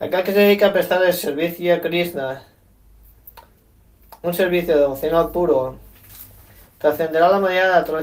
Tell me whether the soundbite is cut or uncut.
uncut